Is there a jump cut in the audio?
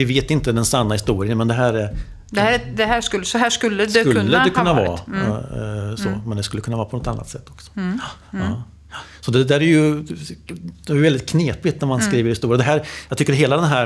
no; 0 cuts

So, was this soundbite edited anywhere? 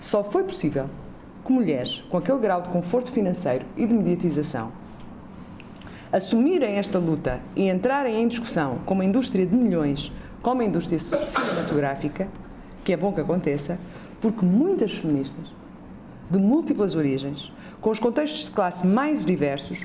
no; 0 cuts

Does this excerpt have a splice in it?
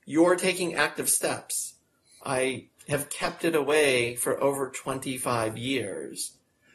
yes; 1 cut; at 2.2 s

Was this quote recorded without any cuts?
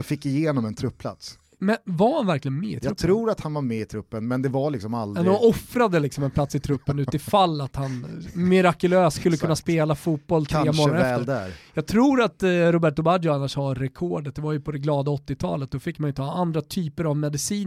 yes; 0 cuts

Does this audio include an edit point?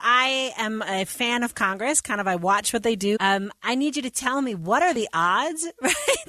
yes; 1 cut; at 3.2 s

